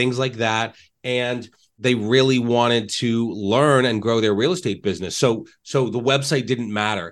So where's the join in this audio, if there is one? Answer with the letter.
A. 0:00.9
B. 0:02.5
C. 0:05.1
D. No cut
D